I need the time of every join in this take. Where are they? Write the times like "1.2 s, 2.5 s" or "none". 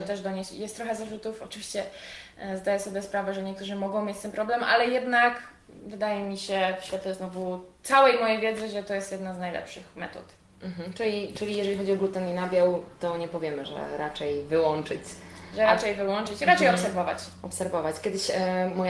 13.6 s